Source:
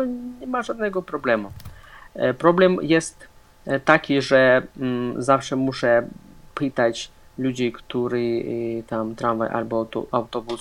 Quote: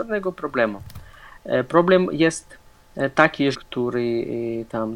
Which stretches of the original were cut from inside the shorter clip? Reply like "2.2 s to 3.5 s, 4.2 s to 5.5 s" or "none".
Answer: 4.2 s to 7.7 s